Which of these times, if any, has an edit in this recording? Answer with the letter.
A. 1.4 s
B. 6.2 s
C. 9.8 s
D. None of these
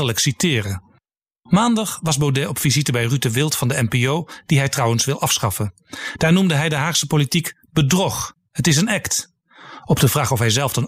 D